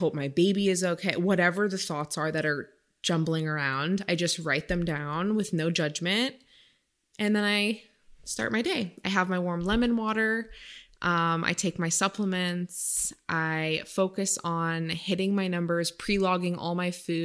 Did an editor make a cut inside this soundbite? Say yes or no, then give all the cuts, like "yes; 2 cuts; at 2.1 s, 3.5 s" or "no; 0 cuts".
no; 0 cuts